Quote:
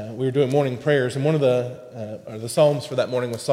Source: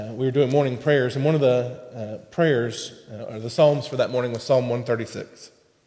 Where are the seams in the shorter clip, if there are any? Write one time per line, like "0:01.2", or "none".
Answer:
0:02.3